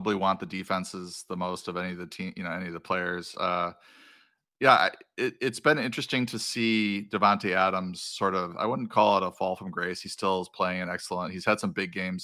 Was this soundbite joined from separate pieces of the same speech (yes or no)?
no